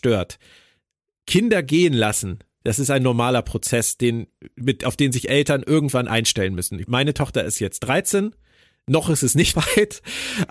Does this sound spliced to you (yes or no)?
yes